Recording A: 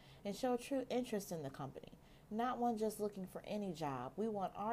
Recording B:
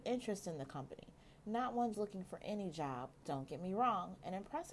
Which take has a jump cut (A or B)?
B